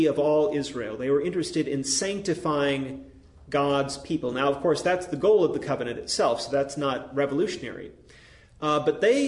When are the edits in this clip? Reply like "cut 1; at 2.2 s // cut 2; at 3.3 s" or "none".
none